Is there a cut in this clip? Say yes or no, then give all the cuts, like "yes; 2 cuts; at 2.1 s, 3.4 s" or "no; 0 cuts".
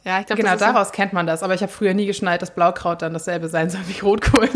no; 0 cuts